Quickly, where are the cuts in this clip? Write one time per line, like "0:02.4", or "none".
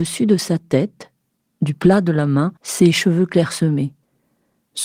0:02.6